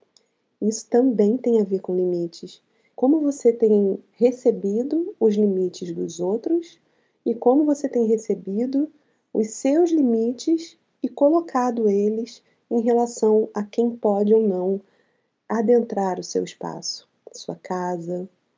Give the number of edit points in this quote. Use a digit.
1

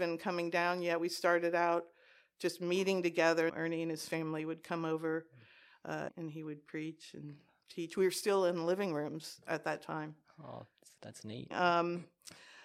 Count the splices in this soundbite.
3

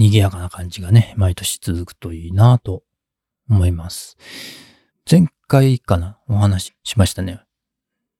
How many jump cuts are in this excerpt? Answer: 2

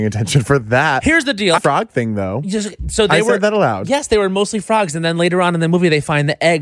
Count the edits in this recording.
1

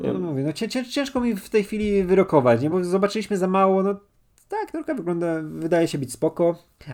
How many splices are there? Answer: 0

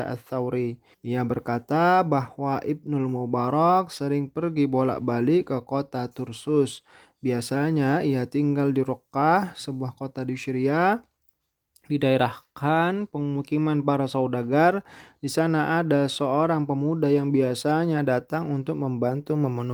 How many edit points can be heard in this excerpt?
1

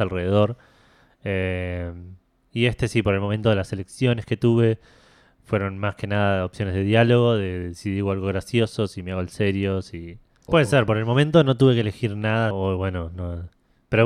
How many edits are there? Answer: 2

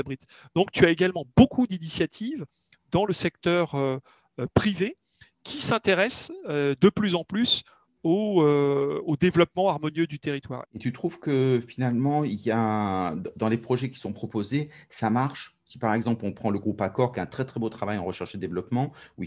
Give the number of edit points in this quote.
1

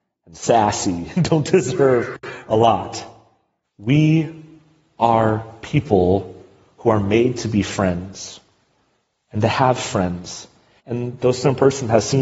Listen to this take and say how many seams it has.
2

